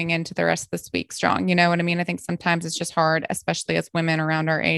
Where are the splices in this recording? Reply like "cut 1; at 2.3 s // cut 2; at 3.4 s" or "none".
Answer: none